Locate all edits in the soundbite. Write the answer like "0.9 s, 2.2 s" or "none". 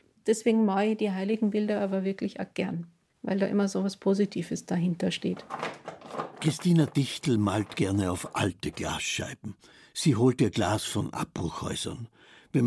6.3 s